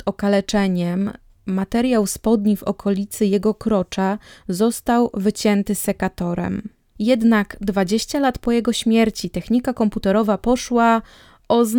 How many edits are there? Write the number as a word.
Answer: one